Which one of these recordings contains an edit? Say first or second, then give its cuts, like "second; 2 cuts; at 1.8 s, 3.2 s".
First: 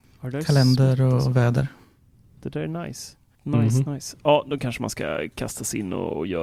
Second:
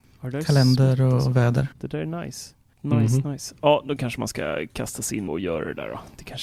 second; 2 cuts; at 1.7 s, 5.3 s